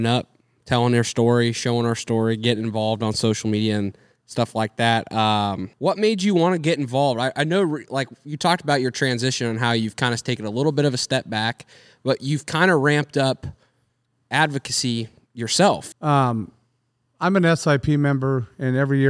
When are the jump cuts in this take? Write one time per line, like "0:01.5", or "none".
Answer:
0:05.7
0:15.9